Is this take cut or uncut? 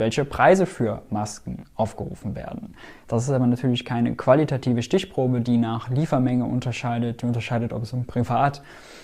uncut